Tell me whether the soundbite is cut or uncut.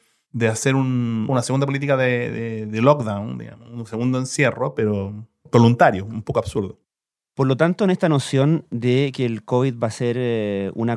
uncut